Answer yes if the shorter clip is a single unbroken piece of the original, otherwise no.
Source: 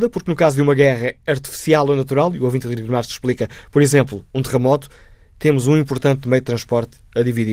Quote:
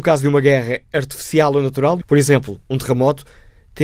no